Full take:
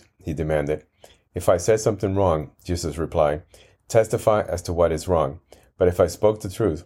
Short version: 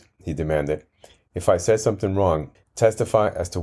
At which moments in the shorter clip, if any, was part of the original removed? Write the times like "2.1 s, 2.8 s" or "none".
2.5 s